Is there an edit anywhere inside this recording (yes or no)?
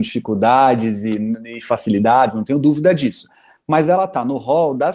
no